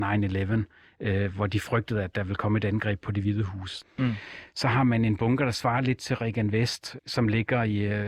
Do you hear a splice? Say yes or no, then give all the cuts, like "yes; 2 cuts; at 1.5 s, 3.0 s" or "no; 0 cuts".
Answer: yes; 2 cuts; at 3.8 s, 7.0 s